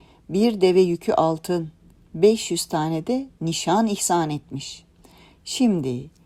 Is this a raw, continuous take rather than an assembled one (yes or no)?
yes